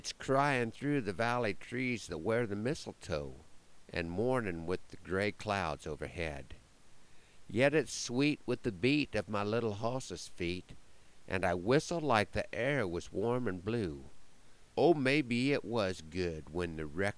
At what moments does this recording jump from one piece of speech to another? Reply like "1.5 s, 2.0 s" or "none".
14.7 s